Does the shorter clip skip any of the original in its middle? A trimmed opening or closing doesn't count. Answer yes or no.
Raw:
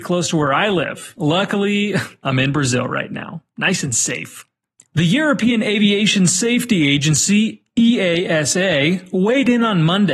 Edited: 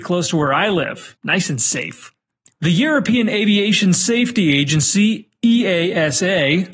yes